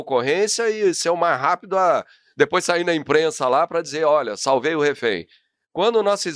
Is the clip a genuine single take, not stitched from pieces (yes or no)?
yes